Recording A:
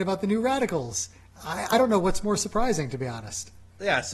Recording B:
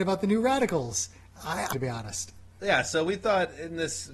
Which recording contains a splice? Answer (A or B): B